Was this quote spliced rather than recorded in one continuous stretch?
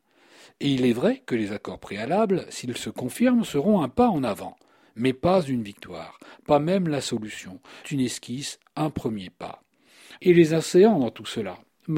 yes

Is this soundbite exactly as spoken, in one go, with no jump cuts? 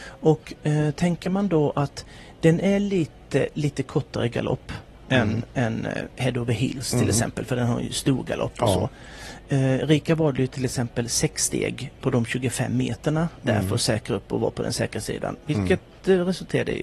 yes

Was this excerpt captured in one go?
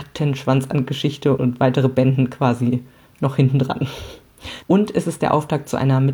no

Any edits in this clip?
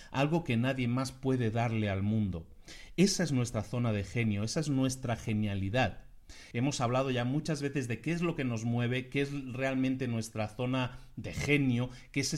yes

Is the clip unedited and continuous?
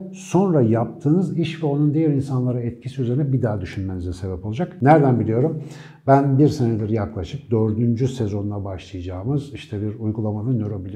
yes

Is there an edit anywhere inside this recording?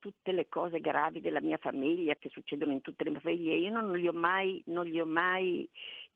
yes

